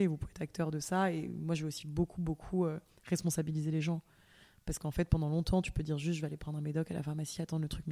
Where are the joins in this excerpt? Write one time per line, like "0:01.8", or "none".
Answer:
none